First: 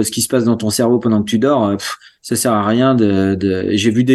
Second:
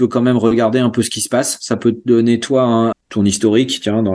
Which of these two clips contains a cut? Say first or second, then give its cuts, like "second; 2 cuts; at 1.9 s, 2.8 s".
second; 1 cut; at 2.9 s